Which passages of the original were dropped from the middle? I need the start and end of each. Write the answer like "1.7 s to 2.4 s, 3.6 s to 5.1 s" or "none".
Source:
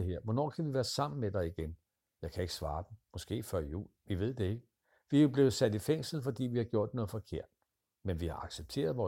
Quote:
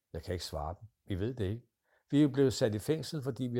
3.1 s to 4.0 s